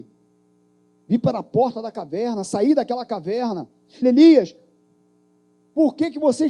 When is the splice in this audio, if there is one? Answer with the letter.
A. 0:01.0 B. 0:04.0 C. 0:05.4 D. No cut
B